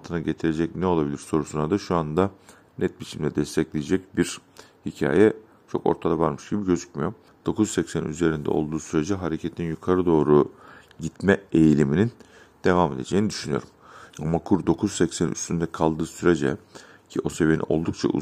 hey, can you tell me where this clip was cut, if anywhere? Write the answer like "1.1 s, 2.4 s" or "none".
7.3 s, 14.1 s